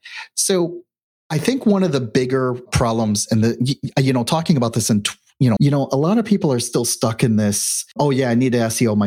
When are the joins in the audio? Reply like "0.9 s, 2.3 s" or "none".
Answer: 5.6 s